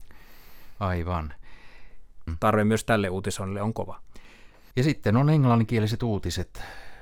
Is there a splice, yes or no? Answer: yes